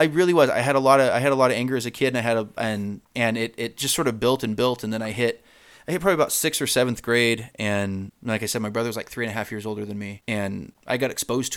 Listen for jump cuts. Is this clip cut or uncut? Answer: uncut